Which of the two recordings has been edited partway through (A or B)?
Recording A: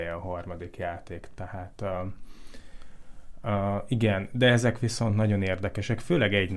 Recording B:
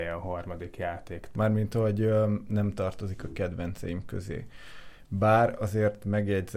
B